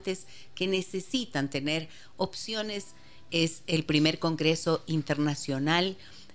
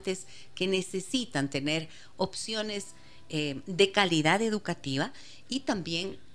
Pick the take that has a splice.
first; 1 cut; at 3.3 s

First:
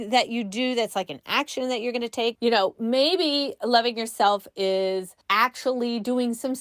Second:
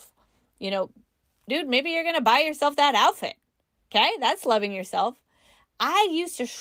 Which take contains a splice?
first; 2 cuts; at 2.3 s, 5.2 s

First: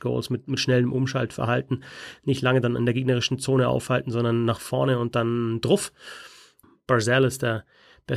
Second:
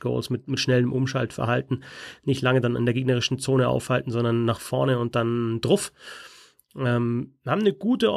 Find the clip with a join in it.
first; 1 cut; at 6.6 s

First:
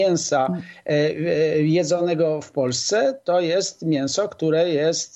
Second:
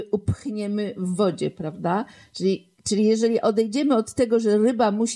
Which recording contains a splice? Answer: second; 1 cut; at 2.8 s

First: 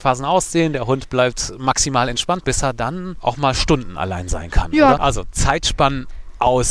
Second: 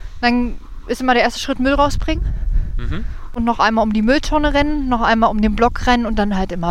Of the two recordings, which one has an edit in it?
first; 1 cut; at 5.0 s

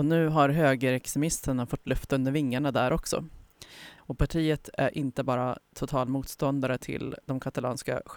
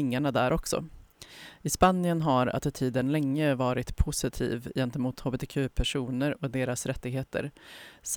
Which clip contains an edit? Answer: first; 1 cut; at 4.0 s

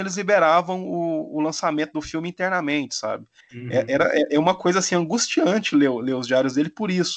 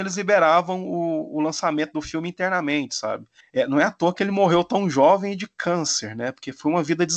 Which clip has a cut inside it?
first; 1 cut; at 3.5 s

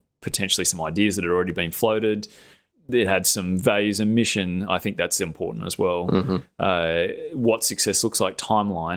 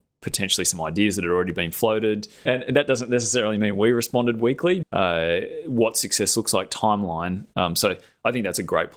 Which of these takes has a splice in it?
second; 3 cuts; at 2.5 s, 4.8 s, 7.5 s

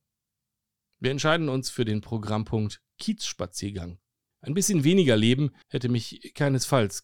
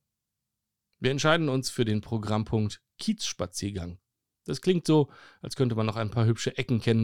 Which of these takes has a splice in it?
first; 2 cuts; at 4.3 s, 5.6 s

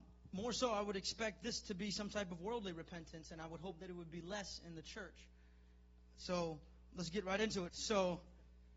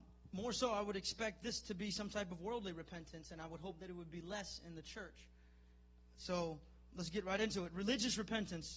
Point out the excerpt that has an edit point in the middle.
first; 1 cut; at 7.7 s

